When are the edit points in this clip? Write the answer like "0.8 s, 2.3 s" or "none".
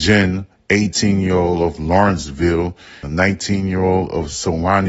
3.0 s